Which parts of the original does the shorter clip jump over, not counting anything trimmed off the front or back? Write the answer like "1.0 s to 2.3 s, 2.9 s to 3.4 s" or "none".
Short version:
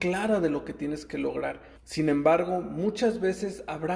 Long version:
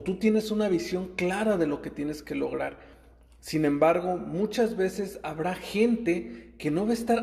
2.9 s to 3.3 s